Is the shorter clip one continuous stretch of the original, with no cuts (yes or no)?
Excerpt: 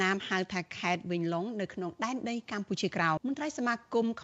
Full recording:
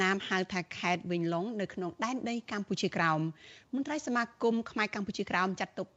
no